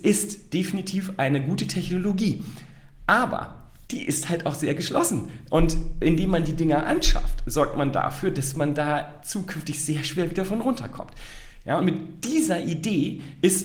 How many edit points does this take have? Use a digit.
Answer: 2